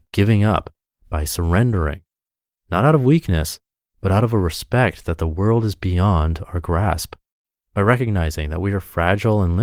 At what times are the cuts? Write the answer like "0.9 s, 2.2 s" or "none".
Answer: none